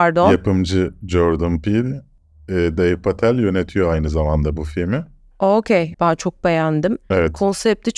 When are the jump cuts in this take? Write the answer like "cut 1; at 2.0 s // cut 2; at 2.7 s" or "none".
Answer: cut 1; at 5.9 s